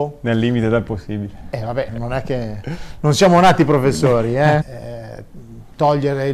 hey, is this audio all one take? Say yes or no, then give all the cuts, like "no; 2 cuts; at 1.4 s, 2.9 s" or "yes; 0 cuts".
no; 2 cuts; at 1.9 s, 4.6 s